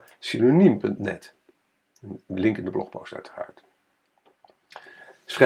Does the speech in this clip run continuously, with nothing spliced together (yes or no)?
yes